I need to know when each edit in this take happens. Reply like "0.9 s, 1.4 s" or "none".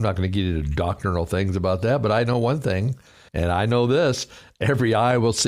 3.3 s

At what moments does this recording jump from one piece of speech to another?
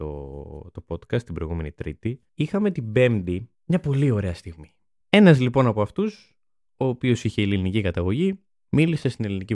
5.0 s

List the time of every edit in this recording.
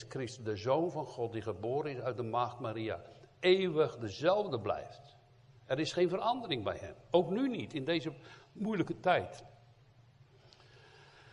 none

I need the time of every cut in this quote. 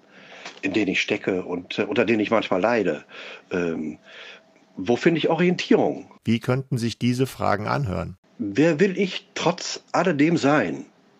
6.2 s

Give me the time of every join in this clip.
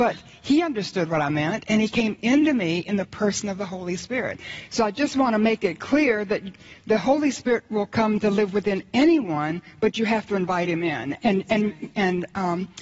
11.9 s

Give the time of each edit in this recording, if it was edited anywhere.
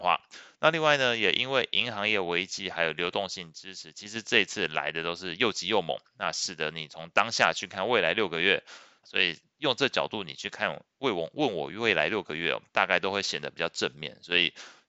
9.0 s

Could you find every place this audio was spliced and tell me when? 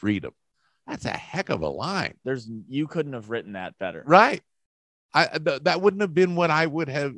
none

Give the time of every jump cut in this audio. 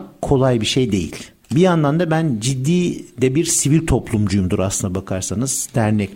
1.4 s

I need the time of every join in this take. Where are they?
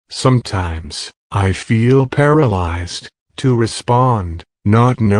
none

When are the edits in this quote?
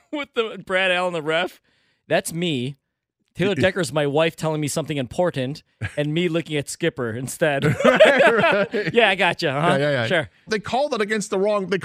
10.5 s

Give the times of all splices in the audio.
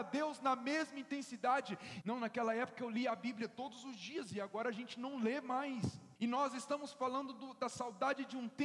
2.0 s, 6.2 s

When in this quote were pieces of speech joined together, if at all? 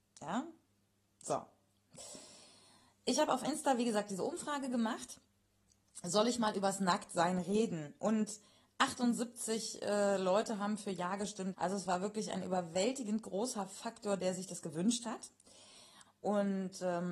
11.5 s, 16.1 s

